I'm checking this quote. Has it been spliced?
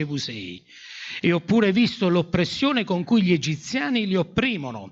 yes; 1 cut; at 1.2 s

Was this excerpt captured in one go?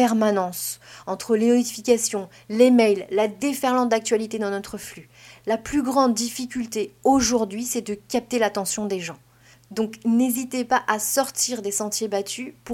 yes; 0 cuts

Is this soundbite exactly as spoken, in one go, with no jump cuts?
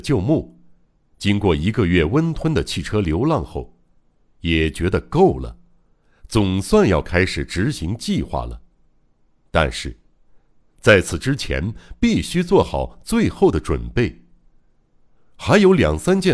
yes; 0 cuts

